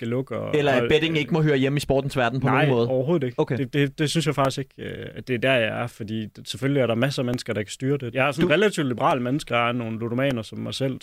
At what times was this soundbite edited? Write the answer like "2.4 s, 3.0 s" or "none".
8.1 s, 9.5 s